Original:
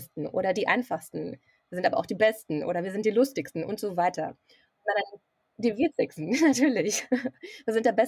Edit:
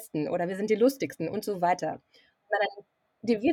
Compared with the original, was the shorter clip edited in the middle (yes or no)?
no